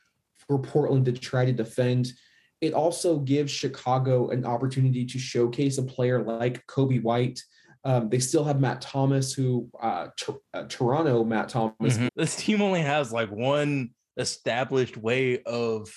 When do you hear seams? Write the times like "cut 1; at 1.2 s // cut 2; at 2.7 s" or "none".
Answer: cut 1; at 12.1 s